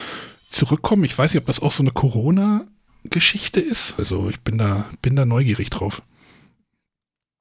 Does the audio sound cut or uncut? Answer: cut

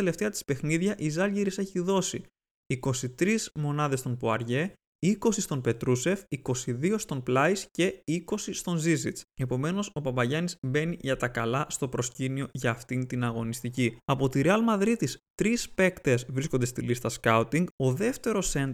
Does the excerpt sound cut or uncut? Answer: cut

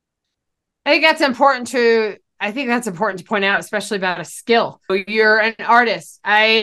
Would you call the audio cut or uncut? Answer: cut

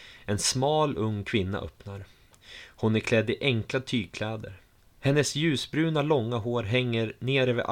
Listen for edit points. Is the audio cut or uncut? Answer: uncut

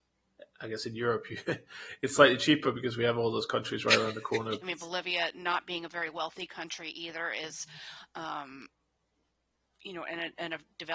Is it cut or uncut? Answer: cut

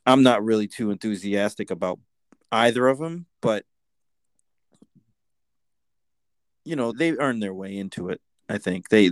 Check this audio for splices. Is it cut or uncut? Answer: cut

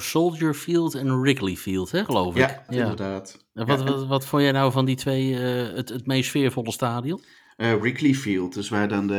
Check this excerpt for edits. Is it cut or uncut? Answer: cut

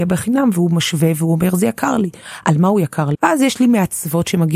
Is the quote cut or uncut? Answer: cut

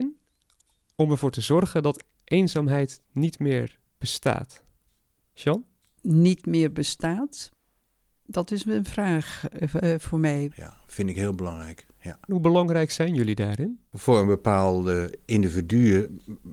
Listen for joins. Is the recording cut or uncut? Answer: cut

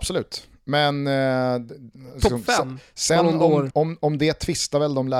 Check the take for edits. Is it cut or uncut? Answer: cut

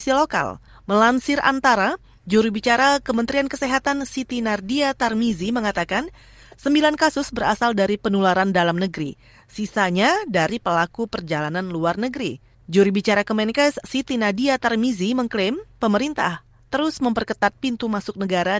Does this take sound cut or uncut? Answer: cut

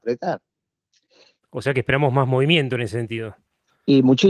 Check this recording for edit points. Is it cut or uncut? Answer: cut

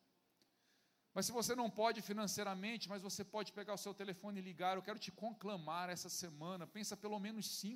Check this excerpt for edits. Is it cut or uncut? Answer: uncut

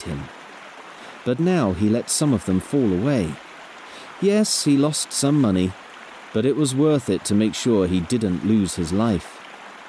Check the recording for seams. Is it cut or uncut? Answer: uncut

